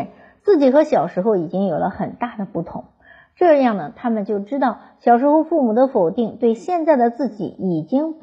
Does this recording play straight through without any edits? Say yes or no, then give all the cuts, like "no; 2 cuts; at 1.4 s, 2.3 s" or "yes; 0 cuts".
yes; 0 cuts